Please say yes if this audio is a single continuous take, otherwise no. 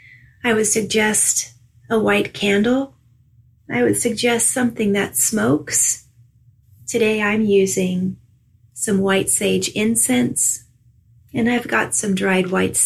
yes